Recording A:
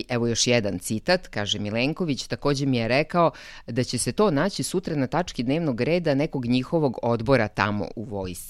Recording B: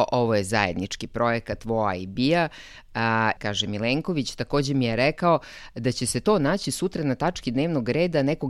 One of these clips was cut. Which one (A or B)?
B